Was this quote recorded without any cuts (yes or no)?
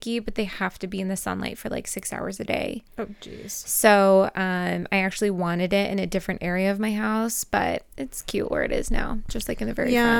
yes